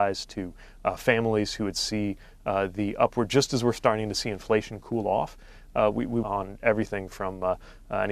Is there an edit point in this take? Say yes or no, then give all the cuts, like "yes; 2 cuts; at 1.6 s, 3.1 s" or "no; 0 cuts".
yes; 1 cut; at 6.2 s